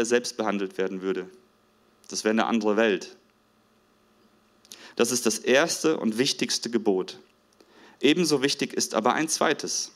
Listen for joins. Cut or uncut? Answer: cut